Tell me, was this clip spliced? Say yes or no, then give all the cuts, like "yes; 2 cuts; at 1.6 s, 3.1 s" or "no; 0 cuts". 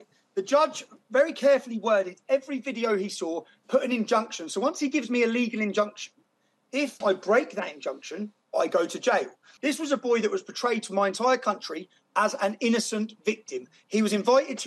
yes; 2 cuts; at 7.0 s, 9.6 s